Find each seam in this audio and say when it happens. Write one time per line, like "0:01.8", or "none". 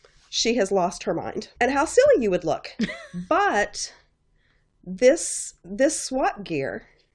0:01.6